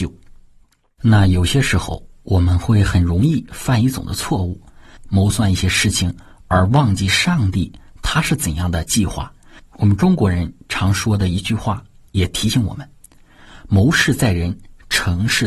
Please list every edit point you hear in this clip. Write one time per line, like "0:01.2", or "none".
0:05.0
0:09.6